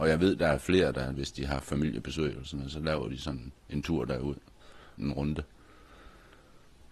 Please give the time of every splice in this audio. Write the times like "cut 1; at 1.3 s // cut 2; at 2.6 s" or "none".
cut 1; at 1.1 s // cut 2; at 5.0 s